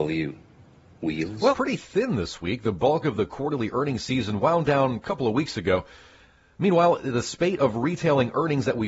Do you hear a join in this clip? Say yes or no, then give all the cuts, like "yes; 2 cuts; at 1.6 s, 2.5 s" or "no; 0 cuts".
yes; 1 cut; at 1.5 s